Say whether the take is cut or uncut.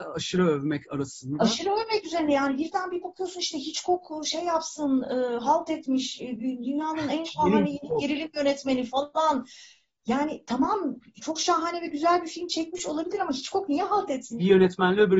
uncut